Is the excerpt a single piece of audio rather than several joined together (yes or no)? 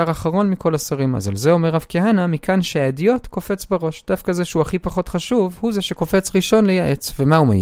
yes